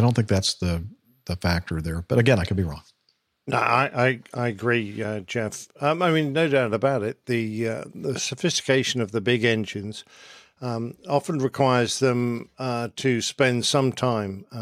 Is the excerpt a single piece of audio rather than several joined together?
yes; 0 cuts

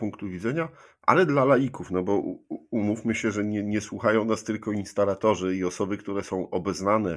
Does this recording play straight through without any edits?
yes; 0 cuts

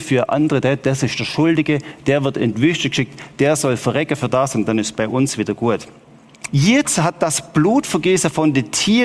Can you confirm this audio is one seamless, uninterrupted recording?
no; 1 cut; at 6.5 s

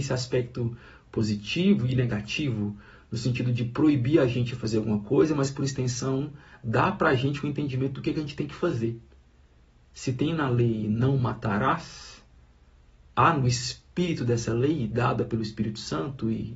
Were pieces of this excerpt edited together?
no; 0 cuts

